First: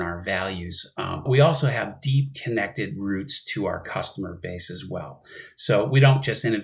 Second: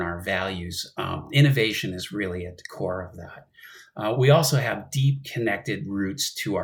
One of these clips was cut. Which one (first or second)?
first